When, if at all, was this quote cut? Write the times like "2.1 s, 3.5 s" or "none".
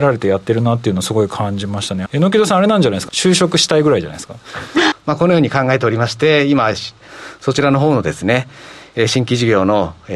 2.1 s, 3.1 s, 4.9 s